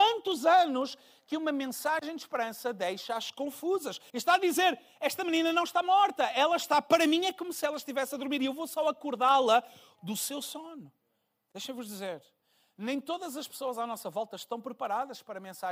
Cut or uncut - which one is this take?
cut